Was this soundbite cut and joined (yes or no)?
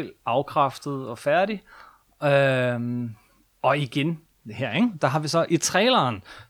no